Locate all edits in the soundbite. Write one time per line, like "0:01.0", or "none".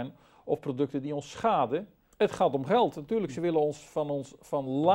0:02.1